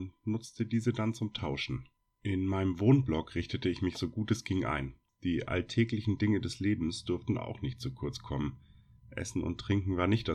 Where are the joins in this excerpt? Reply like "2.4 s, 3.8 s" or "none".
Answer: none